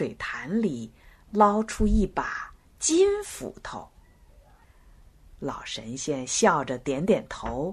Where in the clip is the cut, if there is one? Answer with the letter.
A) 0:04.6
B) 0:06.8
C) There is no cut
A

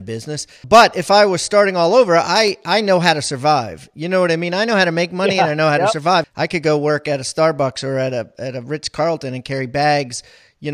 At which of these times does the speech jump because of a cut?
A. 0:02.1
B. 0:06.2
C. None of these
B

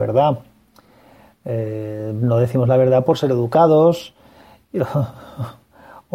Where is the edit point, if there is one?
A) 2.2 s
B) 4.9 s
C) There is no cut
C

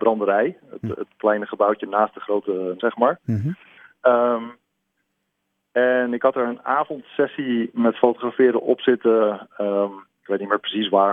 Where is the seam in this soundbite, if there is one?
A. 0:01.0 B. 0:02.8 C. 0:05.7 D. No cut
B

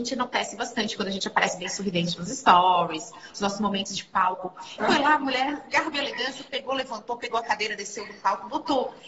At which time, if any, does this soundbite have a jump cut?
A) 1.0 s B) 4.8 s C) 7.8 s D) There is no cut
B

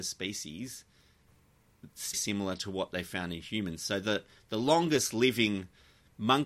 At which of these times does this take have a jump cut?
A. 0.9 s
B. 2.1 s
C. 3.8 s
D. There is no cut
B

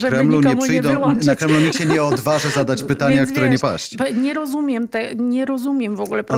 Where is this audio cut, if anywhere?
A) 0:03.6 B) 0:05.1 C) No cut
A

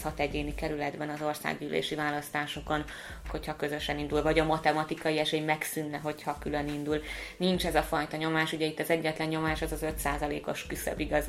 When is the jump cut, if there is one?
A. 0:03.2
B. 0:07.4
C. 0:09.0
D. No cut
A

